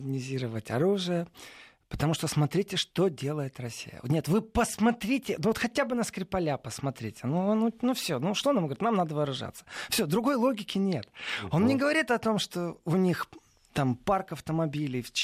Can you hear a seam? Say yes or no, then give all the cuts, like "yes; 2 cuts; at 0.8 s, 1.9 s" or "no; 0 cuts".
no; 0 cuts